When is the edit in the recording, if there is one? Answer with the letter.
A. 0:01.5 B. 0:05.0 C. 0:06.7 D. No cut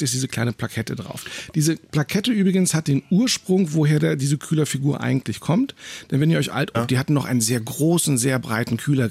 C